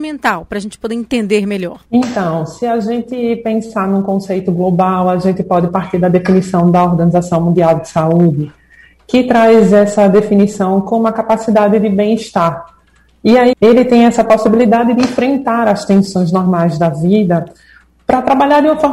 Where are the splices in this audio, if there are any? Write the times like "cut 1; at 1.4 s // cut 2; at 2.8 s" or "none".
cut 1; at 1.9 s // cut 2; at 13.5 s